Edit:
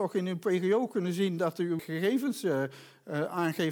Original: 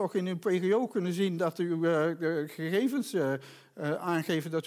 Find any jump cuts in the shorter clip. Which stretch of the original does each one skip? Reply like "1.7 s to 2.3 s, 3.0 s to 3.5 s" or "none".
1.8 s to 2.5 s